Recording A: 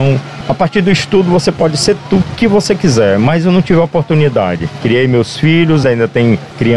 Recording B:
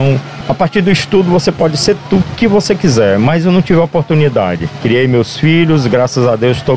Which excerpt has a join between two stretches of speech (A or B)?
A